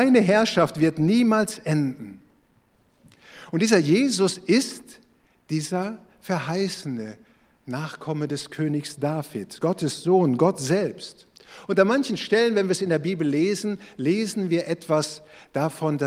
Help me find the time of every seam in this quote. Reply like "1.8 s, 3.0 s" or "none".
none